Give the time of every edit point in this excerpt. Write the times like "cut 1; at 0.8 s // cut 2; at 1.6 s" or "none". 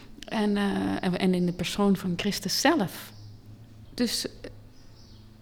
cut 1; at 3.8 s